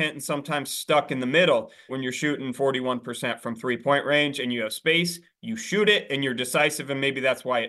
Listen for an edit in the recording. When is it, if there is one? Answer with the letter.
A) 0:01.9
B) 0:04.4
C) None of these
A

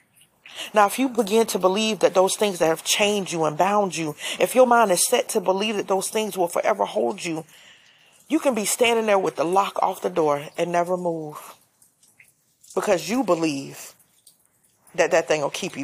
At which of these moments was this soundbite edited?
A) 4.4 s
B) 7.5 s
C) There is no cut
C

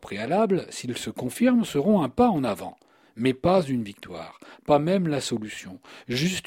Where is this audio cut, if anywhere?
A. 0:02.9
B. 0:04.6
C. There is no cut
C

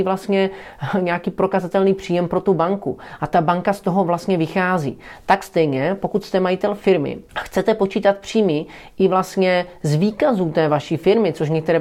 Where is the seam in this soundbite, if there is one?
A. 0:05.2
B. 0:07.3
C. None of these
B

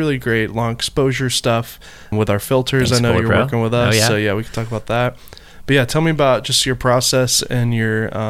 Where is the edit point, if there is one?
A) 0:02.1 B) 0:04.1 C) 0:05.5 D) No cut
A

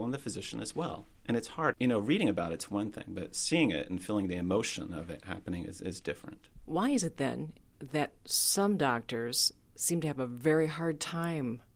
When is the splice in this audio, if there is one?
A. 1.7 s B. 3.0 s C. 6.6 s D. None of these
A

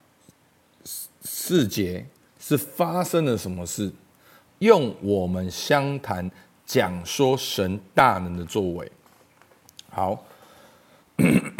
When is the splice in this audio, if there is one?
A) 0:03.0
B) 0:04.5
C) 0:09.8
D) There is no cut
B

